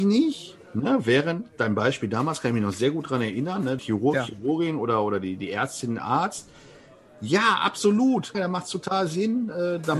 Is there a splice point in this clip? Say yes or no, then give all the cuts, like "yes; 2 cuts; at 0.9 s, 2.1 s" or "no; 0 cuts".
yes; 2 cuts; at 3.8 s, 8.3 s